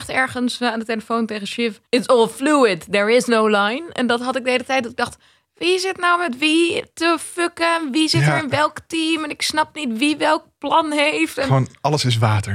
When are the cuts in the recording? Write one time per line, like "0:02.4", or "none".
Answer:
0:01.9